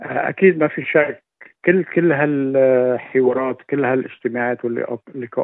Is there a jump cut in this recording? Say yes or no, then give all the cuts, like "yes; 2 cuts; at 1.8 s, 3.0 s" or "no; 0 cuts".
no; 0 cuts